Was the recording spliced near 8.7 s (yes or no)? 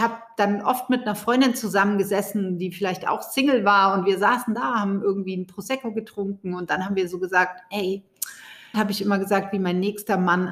yes